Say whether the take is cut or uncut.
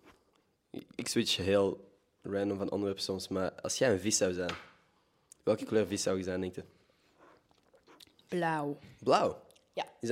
uncut